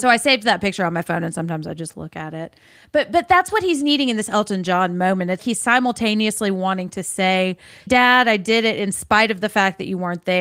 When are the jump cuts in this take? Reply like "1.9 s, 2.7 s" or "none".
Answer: 5.4 s, 7.9 s